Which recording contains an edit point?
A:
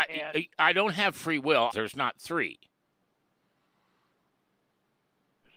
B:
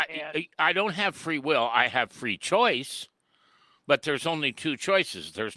A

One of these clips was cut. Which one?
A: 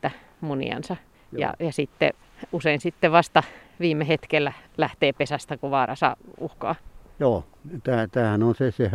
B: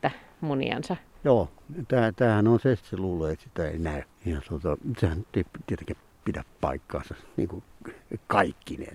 B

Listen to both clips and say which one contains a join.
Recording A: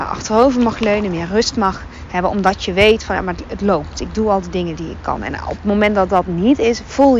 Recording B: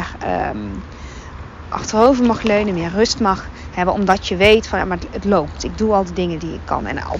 B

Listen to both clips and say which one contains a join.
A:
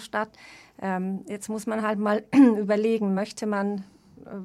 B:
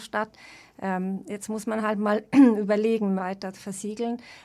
B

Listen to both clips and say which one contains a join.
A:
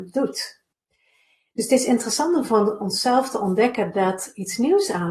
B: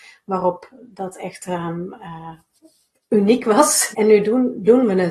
B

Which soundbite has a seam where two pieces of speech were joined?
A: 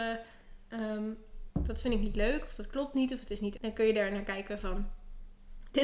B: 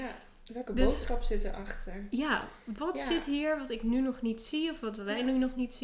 A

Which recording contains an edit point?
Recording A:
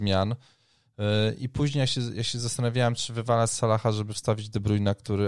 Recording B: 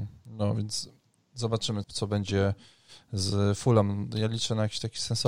B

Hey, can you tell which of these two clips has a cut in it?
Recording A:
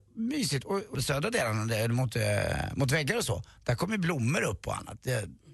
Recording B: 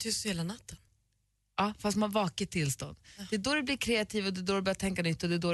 A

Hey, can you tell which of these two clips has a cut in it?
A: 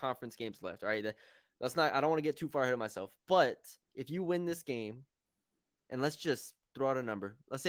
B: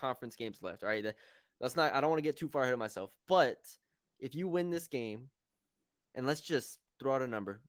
A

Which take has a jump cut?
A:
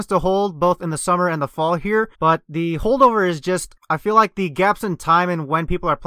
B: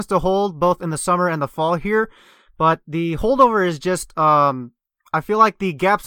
A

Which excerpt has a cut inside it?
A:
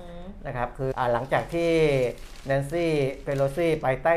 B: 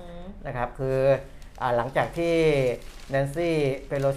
A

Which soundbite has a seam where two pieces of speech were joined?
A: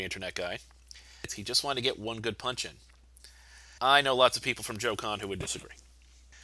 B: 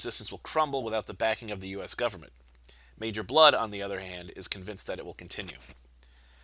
A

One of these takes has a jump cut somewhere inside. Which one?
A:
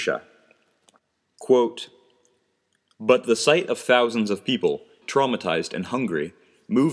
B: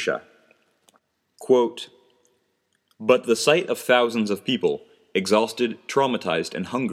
A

